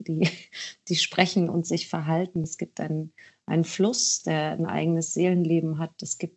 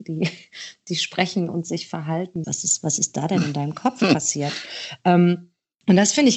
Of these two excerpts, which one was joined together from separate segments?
second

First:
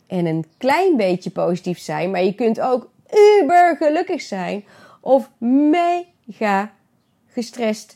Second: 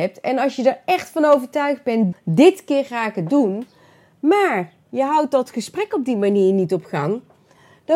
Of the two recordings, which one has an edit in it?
second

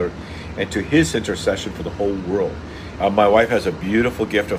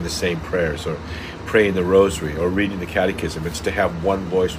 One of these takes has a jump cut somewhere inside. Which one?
first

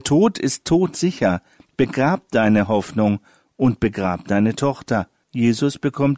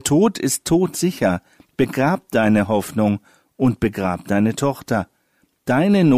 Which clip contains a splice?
first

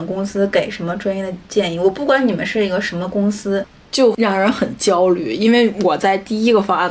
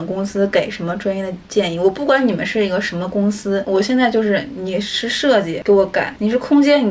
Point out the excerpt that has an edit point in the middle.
first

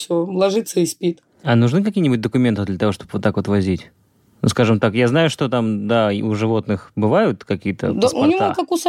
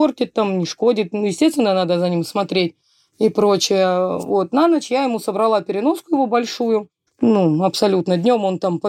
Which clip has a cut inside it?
second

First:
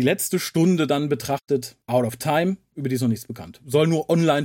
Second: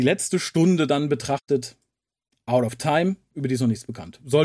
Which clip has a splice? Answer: first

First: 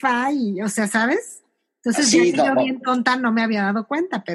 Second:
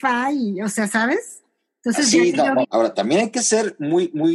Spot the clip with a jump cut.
second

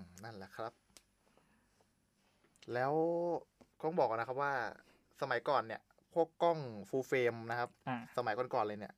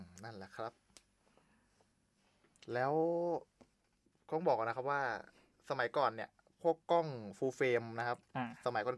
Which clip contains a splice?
first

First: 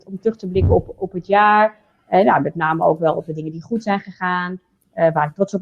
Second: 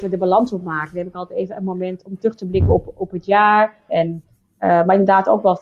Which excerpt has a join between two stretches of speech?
second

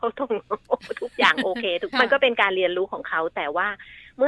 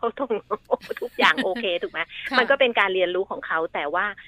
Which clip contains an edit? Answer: first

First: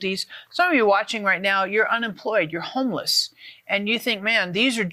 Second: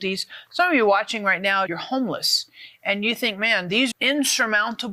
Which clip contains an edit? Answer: second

